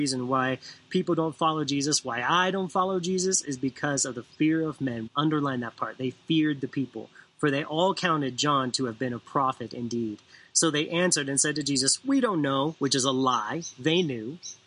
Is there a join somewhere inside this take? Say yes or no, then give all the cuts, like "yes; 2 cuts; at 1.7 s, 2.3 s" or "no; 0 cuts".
yes; 1 cut; at 5.1 s